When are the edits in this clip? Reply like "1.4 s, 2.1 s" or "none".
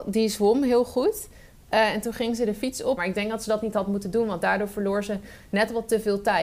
3.0 s